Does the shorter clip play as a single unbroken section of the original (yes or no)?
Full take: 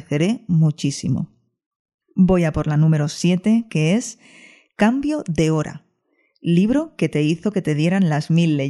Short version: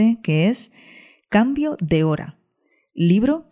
yes